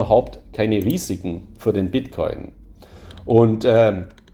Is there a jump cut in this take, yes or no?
no